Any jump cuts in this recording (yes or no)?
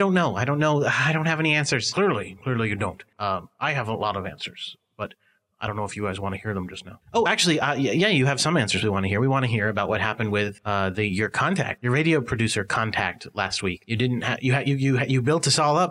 no